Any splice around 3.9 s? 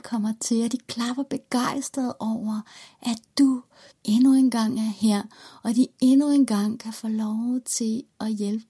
yes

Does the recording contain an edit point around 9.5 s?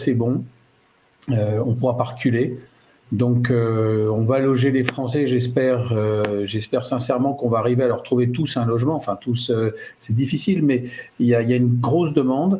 no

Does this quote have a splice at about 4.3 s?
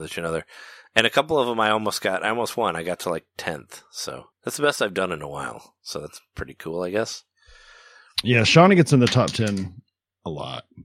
yes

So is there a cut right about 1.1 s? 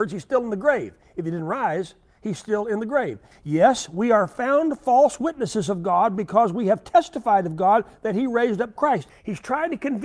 no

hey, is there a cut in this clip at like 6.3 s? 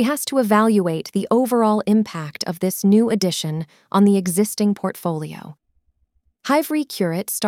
yes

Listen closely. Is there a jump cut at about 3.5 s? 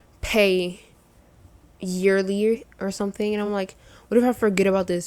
no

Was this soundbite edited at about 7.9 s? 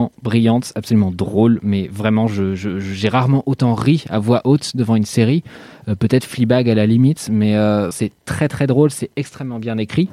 yes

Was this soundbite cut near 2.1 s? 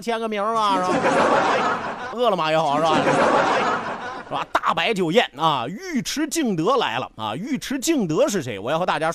yes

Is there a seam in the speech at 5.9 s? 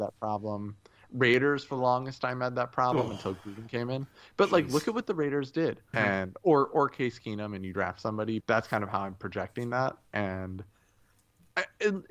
yes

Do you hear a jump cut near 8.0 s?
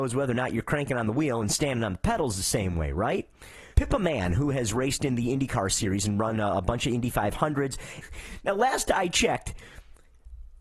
yes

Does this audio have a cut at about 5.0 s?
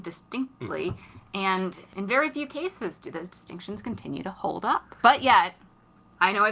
yes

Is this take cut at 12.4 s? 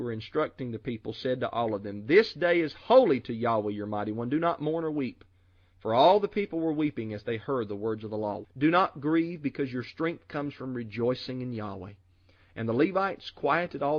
no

